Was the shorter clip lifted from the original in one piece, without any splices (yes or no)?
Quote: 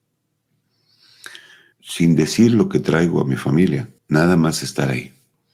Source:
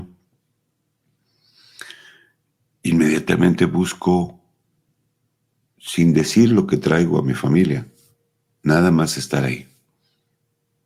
no